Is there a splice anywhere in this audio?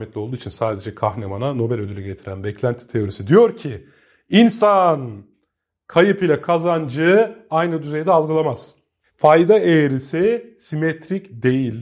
yes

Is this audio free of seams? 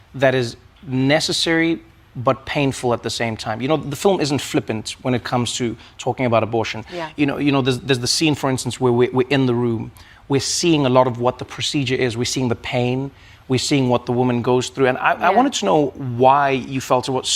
yes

